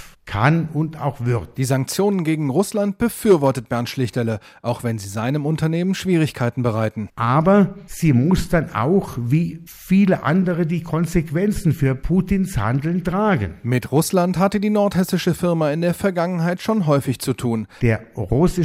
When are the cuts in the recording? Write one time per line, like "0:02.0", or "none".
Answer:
0:07.1